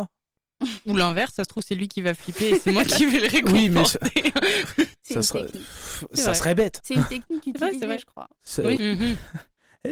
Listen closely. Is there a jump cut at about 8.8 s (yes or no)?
yes